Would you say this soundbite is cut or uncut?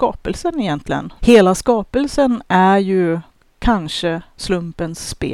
cut